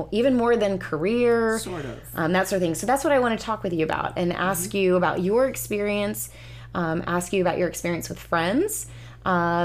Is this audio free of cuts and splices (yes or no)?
yes